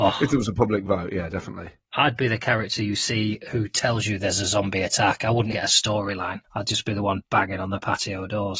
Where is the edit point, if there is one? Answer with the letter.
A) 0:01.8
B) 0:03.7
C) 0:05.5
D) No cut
C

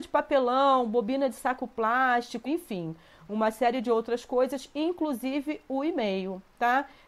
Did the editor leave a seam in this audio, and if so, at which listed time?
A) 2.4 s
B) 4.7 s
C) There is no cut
A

